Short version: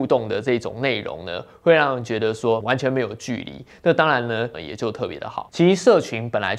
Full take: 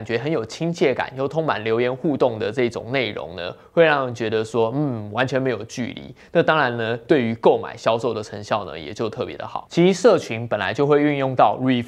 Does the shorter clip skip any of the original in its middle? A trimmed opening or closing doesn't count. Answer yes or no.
yes